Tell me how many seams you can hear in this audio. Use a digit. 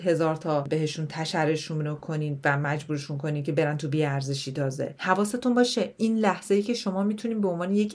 0